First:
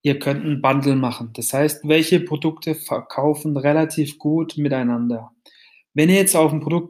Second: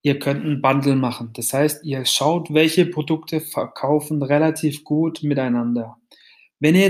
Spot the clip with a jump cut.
first; 1 cut; at 1.8 s

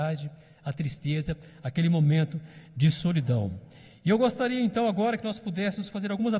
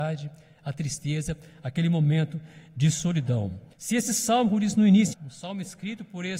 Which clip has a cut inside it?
second; 2 cuts; at 3.7 s, 5.1 s

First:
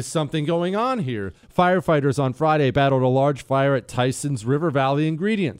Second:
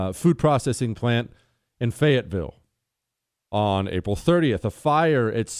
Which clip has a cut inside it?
first; 1 cut; at 1.4 s

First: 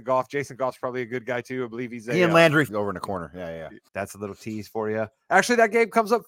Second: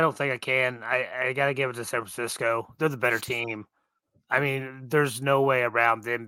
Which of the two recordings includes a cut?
first; 2 cuts; at 2.7 s, 3.9 s

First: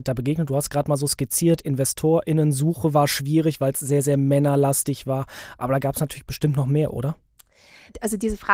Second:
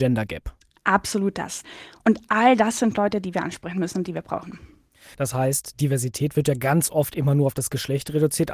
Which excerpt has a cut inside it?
second; 1 cut; at 5.1 s

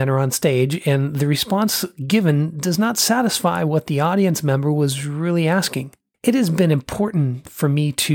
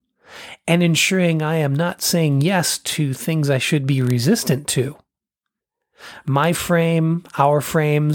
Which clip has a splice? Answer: first; 1 cut; at 6.1 s

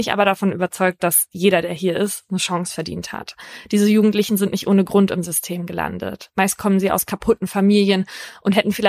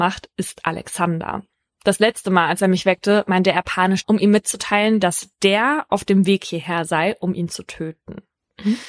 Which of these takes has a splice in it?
second; 1 cut; at 4.0 s

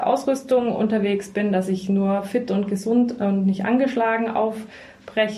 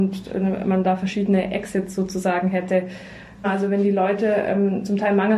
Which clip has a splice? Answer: second; 1 cut; at 3.4 s

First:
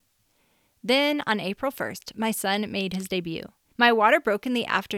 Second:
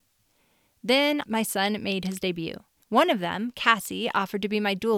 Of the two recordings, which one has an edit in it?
second; 2 cuts; at 1.2 s, 2.8 s

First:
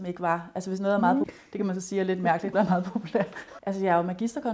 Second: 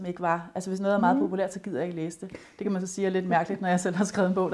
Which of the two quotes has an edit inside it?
first; 3 cuts; at 1.2 s, 2.5 s, 3.6 s

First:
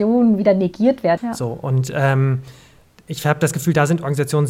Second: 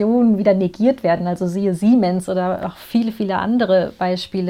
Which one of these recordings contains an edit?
first; 1 cut; at 1.2 s

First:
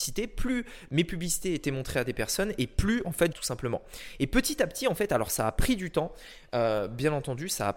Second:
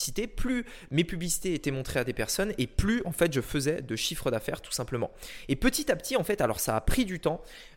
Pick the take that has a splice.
first; 1 cut; at 3.3 s

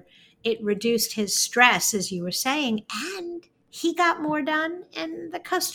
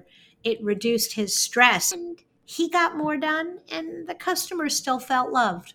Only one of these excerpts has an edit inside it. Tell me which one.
second; 1 cut; at 1.9 s

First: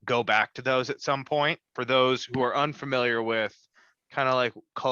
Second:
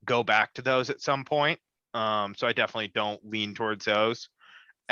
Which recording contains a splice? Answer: first; 1 cut; at 1.7 s

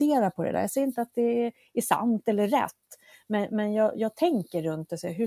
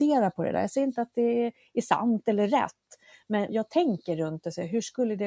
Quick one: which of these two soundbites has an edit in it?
second; 1 cut; at 3.5 s

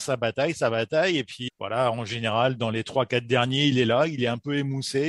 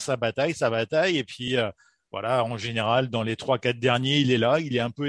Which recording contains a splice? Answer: first; 1 cut; at 1.5 s

